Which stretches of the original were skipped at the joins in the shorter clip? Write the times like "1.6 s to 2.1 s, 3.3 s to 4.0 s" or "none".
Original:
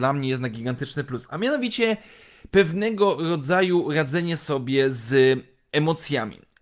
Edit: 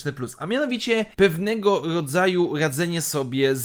2.0 s to 2.5 s